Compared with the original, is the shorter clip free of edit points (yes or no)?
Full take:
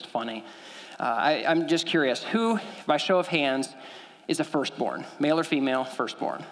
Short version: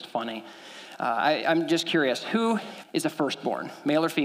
no